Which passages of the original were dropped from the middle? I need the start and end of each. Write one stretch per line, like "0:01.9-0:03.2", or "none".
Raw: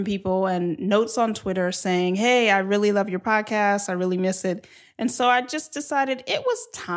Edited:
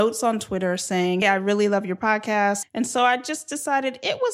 0:02.2-0:02.5
0:03.9-0:04.9